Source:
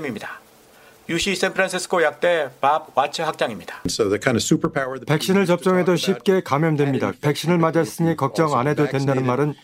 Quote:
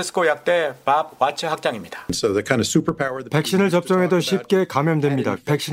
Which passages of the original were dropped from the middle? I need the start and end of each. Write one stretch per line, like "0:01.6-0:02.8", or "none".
none